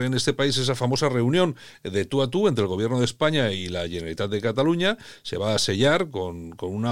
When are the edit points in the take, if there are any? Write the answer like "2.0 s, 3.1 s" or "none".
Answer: none